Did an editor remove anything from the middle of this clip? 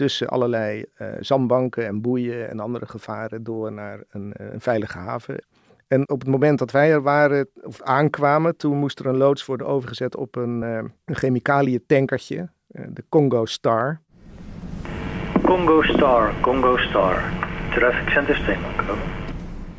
no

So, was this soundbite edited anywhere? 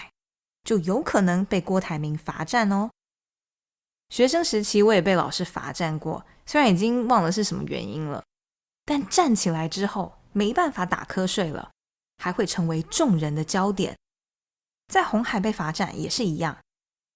no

